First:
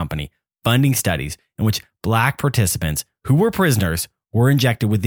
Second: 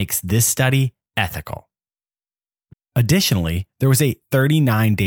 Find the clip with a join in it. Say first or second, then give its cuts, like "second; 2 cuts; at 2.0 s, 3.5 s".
second; 1 cut; at 2.7 s